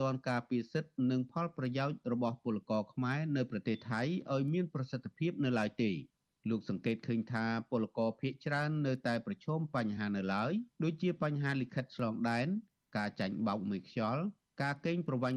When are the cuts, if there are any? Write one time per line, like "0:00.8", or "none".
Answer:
none